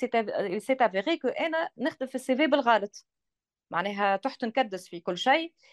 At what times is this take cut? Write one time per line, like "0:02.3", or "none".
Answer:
none